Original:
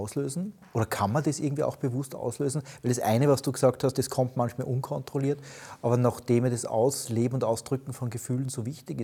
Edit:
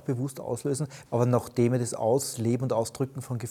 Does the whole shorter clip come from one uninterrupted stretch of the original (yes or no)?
no